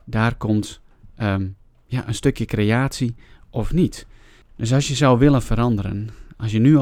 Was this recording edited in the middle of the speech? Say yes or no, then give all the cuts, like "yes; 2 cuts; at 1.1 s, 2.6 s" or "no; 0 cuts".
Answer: no; 0 cuts